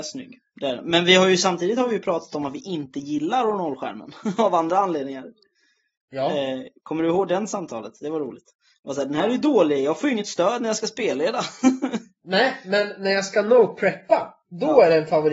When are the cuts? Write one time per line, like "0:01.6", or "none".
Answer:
none

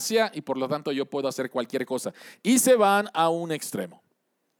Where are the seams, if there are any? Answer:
none

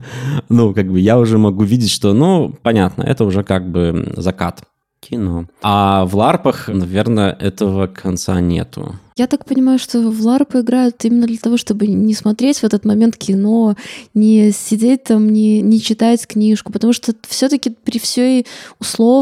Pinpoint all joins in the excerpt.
none

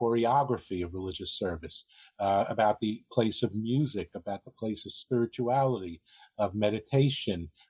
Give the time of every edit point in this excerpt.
none

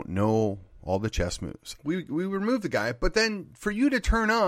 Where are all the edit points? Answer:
0:01.8

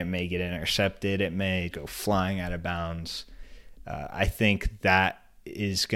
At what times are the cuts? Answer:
0:01.7

